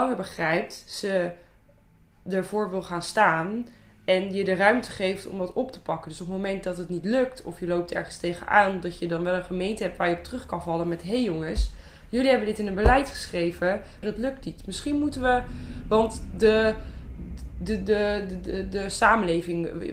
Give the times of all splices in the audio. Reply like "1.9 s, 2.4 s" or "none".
14.0 s